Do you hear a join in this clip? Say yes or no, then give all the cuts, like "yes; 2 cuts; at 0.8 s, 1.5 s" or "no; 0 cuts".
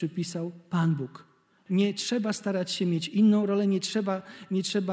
yes; 1 cut; at 1.7 s